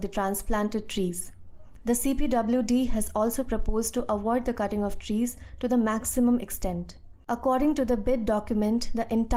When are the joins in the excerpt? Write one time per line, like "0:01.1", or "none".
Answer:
0:01.8
0:07.3